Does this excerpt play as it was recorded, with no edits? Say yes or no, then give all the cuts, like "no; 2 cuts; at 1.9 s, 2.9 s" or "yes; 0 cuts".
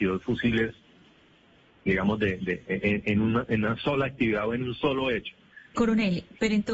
no; 1 cut; at 5.7 s